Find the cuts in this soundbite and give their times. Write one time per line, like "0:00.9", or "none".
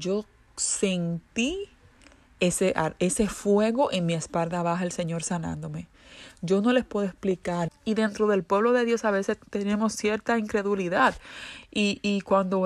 0:07.7